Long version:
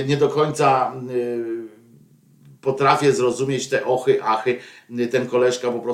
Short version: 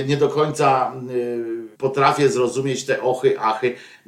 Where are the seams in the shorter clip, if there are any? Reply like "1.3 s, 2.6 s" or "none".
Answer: 1.7 s